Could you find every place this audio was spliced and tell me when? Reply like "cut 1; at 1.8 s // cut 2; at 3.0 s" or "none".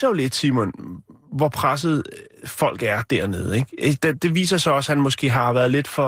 cut 1; at 4.0 s

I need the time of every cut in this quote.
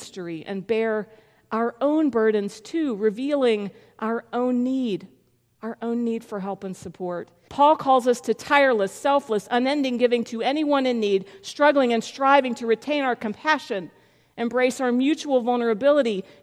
cut 1; at 7.5 s

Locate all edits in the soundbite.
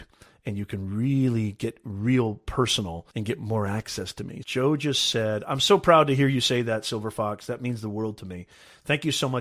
cut 1; at 3.1 s // cut 2; at 4.4 s

